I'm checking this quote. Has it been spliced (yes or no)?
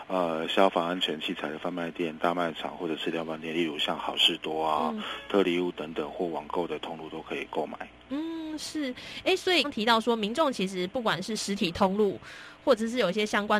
yes